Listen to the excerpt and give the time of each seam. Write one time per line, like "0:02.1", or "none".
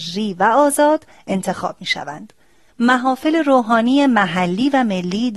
0:02.7